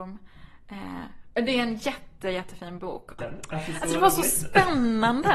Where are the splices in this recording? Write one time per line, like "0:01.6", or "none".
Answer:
0:01.3
0:03.2